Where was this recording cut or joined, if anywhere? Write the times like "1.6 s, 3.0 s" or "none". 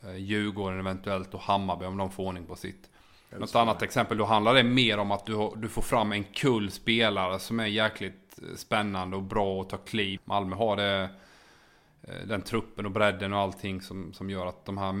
3.3 s, 10.2 s